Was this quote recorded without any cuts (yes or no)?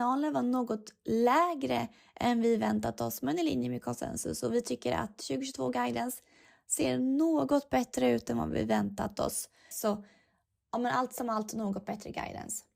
no